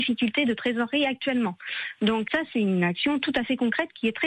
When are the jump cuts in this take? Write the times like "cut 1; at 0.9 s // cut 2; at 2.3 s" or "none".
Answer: cut 1; at 2.3 s

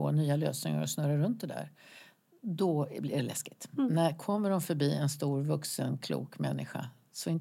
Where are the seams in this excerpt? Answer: none

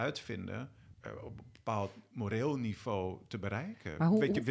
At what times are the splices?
cut 1; at 0.9 s

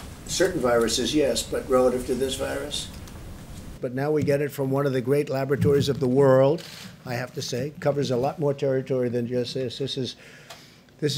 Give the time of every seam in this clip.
cut 1; at 3.8 s

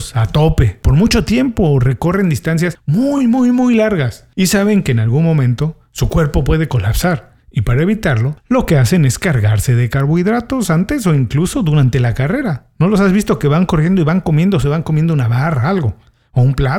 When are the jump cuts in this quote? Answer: none

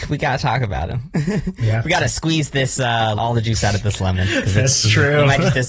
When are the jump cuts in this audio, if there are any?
cut 1; at 3.2 s

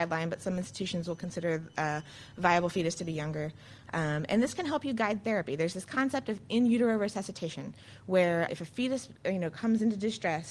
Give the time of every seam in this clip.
cut 1; at 8.5 s

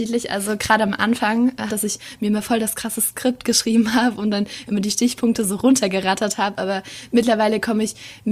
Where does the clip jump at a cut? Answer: cut 1; at 1.7 s

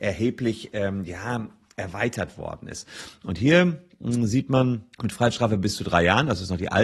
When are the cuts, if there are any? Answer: cut 1; at 4.9 s

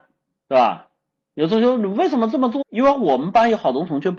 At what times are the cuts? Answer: cut 1; at 2.6 s

